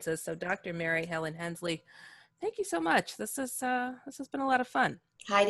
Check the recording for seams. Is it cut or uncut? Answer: uncut